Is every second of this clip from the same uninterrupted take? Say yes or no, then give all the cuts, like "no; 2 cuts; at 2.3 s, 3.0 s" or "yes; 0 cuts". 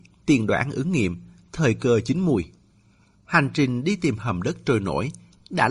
yes; 0 cuts